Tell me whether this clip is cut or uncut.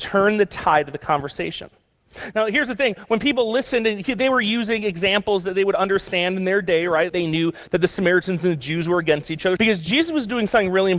cut